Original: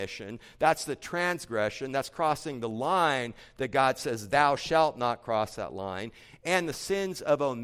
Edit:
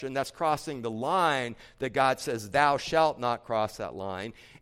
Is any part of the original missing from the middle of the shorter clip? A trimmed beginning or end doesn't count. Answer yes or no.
no